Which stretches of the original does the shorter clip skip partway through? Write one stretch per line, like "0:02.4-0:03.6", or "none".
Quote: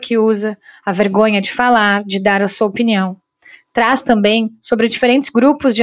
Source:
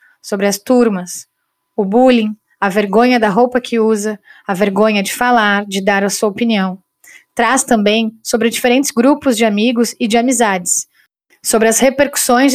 none